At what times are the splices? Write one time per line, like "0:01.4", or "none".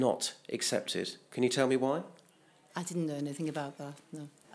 none